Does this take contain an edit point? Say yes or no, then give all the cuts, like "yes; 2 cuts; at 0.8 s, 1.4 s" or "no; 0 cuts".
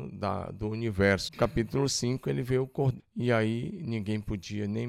yes; 2 cuts; at 1.3 s, 3.0 s